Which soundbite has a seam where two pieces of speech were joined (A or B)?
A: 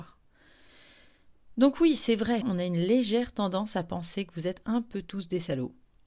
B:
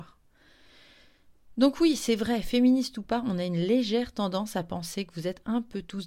A